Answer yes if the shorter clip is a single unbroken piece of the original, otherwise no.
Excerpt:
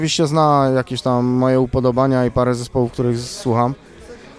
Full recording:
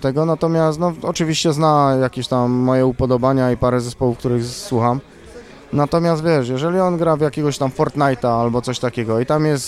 yes